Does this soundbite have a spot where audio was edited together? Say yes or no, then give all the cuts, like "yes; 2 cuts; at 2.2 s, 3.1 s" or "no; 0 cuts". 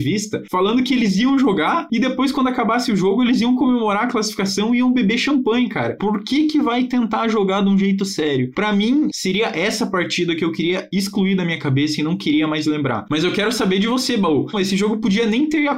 yes; 3 cuts; at 6.0 s, 9.1 s, 14.5 s